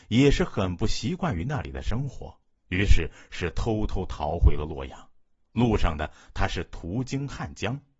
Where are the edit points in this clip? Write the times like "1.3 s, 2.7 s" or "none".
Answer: none